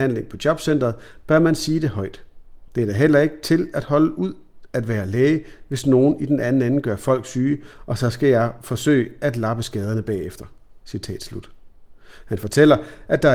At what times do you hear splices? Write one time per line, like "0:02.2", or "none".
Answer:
0:02.7